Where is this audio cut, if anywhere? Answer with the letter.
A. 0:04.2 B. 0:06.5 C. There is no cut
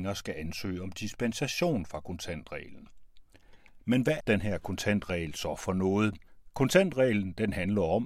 A